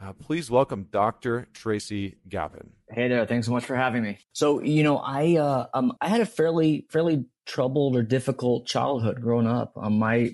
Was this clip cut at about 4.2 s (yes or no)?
yes